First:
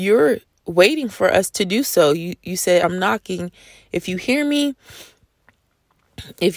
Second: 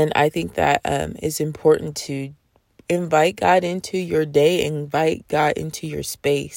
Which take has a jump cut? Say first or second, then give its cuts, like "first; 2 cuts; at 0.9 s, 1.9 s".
first; 1 cut; at 2.8 s